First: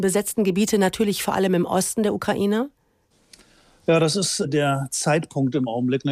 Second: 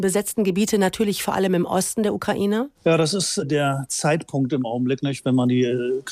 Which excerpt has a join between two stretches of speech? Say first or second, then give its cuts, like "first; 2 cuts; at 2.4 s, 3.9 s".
second; 1 cut; at 2.7 s